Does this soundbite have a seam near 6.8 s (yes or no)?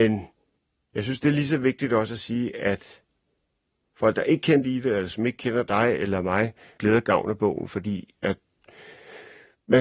yes